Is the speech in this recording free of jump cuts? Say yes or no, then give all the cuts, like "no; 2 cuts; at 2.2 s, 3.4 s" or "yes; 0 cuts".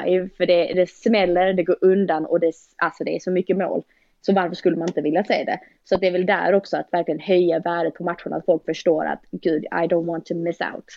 yes; 0 cuts